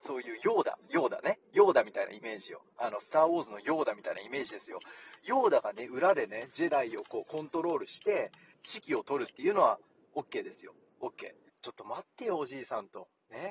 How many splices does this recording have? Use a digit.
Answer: 2